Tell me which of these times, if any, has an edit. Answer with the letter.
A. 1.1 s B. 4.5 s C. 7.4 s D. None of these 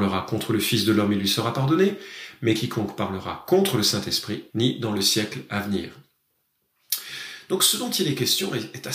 B